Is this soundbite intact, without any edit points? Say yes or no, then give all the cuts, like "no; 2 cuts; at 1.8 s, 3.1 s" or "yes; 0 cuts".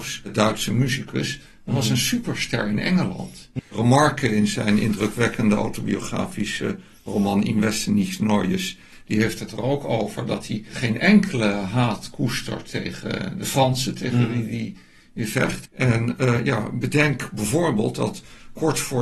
no; 2 cuts; at 3.6 s, 15.7 s